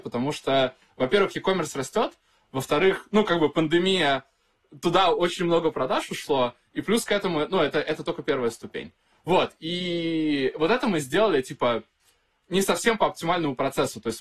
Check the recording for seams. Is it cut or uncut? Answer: uncut